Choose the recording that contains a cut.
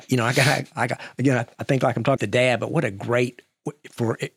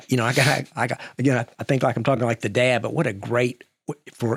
first; 1 cut; at 2.2 s

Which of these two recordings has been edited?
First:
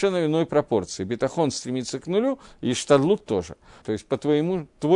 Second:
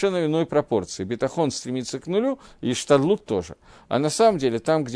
first; 1 cut; at 3.8 s

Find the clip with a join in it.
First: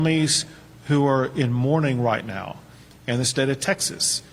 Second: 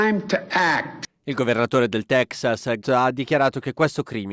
second; 1 cut; at 2.8 s

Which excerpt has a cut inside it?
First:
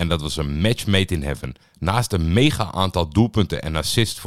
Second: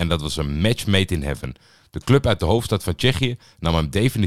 first; 1 cut; at 1.6 s

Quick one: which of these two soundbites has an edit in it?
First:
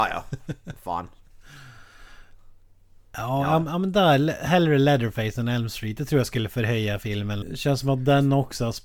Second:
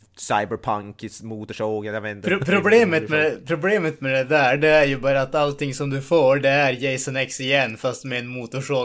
first; 1 cut; at 7.4 s

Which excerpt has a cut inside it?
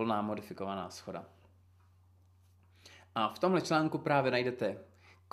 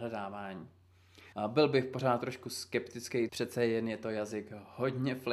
second; 2 cuts; at 1.3 s, 3.3 s

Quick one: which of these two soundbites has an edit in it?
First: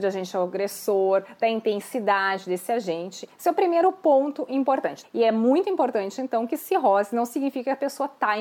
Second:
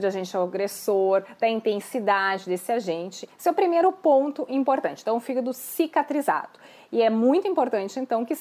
first; 1 cut; at 5.0 s

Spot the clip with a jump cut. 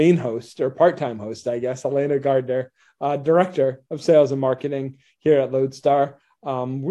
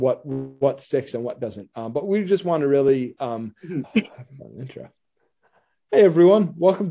second; 1 cut; at 3.8 s

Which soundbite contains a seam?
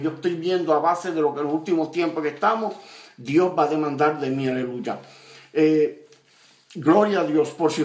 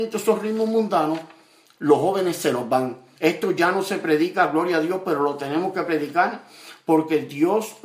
second; 1 cut; at 3.2 s

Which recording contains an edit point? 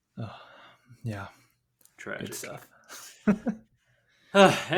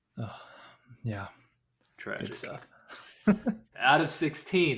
second; 1 cut; at 3.7 s

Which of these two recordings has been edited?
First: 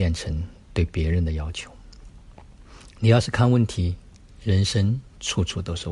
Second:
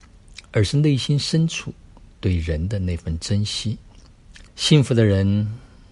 second; 1 cut; at 4.5 s

